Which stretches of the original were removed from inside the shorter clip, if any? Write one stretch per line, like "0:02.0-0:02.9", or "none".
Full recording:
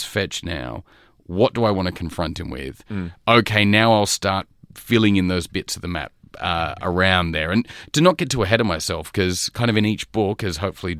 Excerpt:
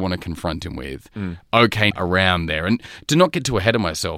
0:03.6-0:06.8